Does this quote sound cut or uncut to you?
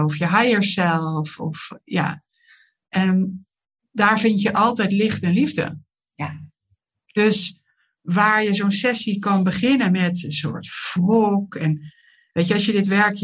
uncut